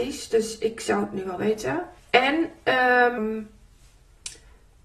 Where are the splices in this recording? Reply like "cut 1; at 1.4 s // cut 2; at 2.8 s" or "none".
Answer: cut 1; at 2.0 s // cut 2; at 3.2 s